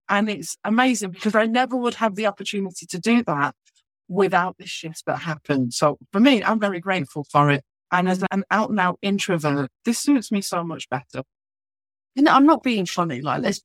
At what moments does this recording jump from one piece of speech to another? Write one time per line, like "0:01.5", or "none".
none